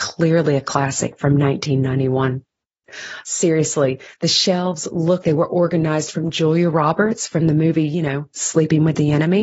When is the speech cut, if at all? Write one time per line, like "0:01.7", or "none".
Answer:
0:03.2
0:05.2